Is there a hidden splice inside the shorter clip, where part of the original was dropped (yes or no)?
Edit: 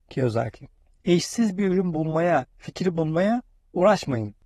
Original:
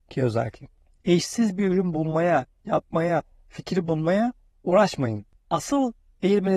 yes